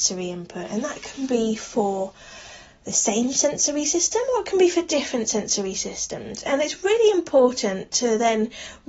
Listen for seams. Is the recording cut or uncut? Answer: uncut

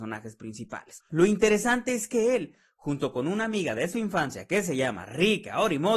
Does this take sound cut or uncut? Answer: cut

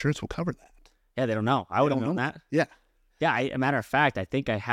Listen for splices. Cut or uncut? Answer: uncut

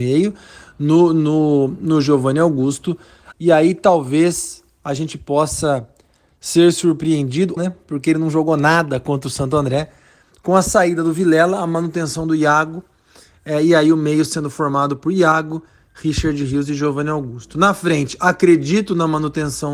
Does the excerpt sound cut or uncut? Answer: cut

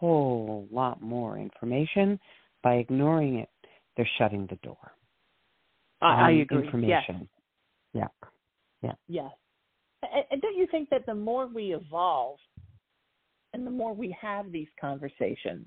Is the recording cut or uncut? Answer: uncut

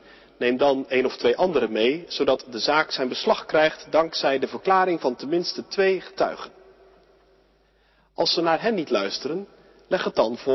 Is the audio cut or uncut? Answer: uncut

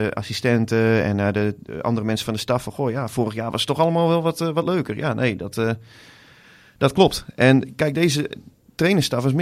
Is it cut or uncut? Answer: uncut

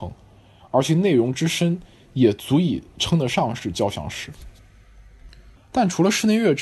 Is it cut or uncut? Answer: cut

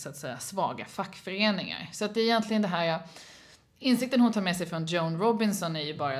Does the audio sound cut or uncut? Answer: uncut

